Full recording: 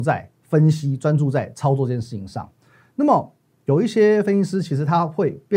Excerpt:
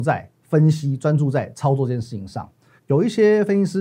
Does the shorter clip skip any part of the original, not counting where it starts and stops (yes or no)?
yes